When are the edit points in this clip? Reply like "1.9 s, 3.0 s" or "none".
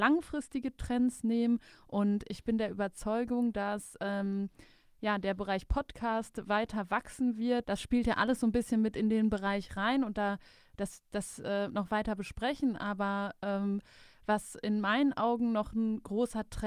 7.6 s, 11.7 s